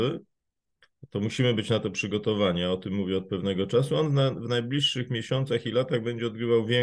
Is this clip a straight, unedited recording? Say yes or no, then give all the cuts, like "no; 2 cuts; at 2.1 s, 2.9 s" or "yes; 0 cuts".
yes; 0 cuts